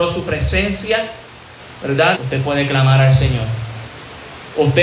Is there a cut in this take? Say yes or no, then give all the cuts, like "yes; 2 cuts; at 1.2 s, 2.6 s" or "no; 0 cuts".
yes; 1 cut; at 2.1 s